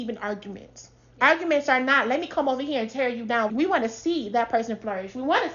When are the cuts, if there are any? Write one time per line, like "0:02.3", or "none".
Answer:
0:03.5